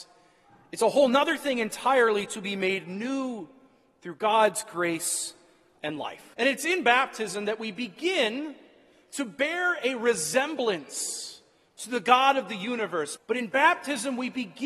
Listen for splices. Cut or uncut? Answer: cut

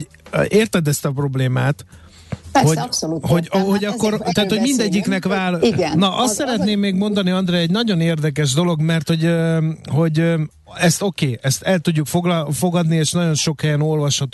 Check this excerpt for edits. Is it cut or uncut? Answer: cut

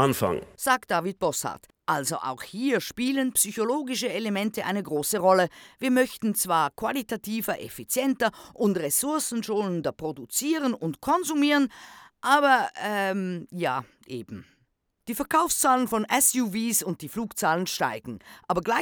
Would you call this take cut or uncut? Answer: uncut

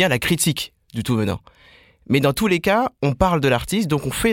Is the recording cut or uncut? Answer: uncut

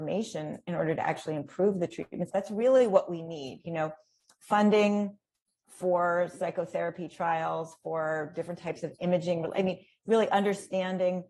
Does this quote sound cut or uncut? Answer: cut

